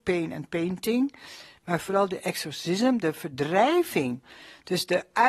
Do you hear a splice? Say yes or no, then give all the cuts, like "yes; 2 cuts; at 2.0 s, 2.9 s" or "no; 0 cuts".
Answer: no; 0 cuts